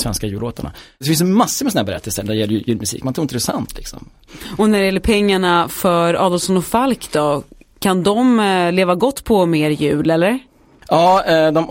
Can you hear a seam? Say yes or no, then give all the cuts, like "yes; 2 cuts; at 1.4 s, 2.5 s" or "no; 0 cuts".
no; 0 cuts